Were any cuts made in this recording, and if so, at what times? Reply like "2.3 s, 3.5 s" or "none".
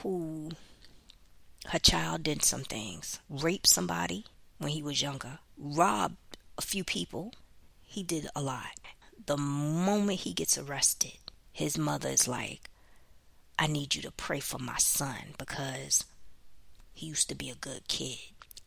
3.2 s